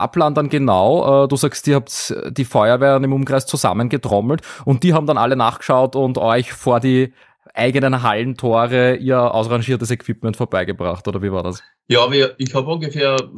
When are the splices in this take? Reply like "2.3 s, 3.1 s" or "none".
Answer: none